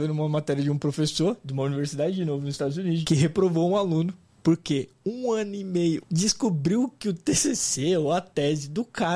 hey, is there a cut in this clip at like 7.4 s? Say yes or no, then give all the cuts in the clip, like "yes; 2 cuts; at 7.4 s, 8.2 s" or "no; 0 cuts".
no; 2 cuts; at 3.0 s, 6.0 s